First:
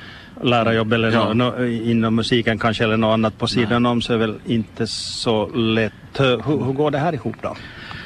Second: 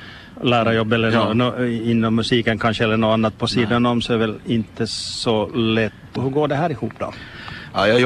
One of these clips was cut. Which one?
second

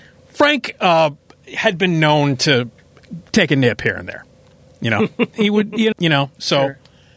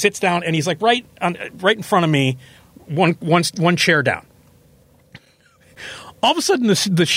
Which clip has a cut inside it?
first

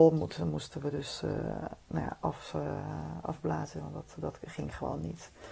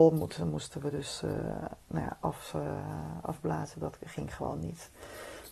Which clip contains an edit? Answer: second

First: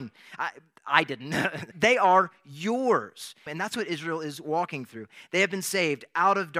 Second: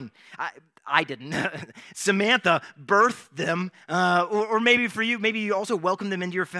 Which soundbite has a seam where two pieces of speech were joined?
first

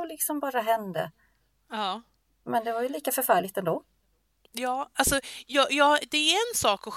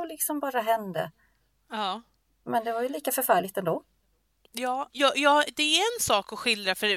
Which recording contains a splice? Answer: second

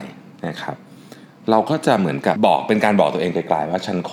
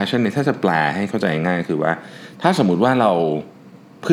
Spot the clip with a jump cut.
first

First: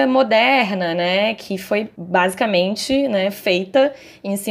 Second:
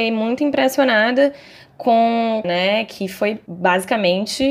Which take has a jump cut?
second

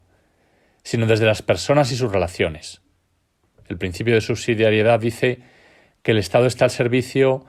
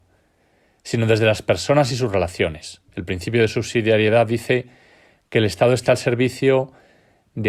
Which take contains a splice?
second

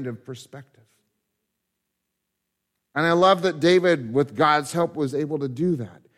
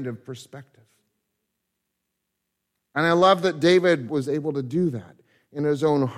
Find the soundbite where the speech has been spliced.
second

